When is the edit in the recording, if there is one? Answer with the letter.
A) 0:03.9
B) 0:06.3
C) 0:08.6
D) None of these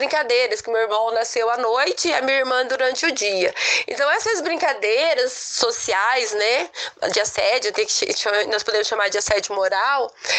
D